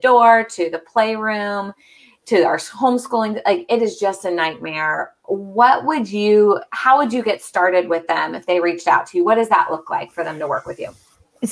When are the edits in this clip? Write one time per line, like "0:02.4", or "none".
none